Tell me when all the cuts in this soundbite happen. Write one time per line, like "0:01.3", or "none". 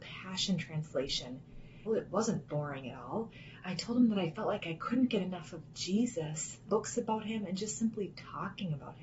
0:01.9
0:03.6
0:06.7